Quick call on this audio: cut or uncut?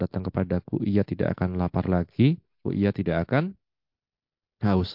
cut